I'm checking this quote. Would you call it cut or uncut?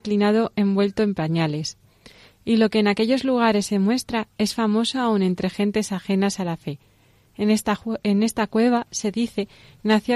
uncut